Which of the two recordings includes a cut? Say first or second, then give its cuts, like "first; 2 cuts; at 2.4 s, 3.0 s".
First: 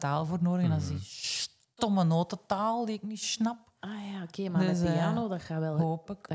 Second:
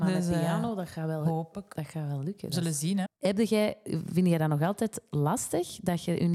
second; 1 cut; at 3.1 s